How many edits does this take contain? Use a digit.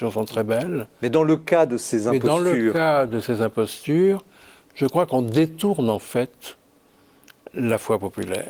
0